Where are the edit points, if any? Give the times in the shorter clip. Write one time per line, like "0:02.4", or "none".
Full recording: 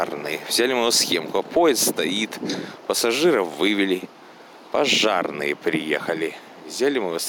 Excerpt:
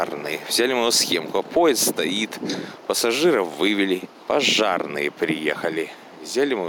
0:04.1